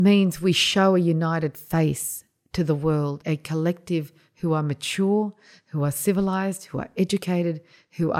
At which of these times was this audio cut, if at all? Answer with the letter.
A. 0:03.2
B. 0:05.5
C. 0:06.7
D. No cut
A